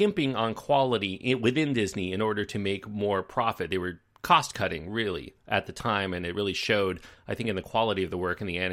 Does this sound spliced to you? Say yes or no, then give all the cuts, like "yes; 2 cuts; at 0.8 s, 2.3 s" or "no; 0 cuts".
no; 0 cuts